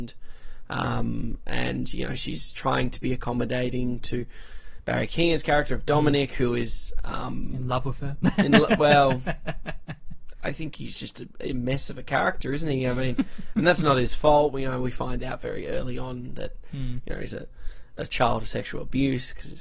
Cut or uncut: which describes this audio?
uncut